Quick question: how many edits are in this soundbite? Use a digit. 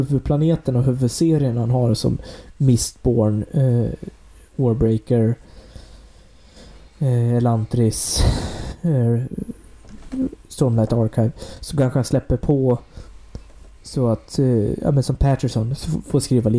0